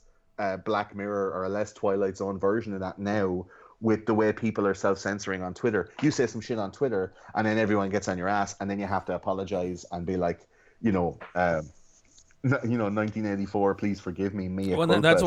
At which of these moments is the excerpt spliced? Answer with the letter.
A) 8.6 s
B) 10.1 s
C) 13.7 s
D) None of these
D